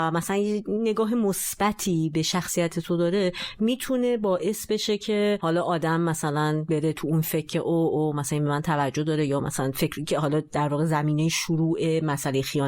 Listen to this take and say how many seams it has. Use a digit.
0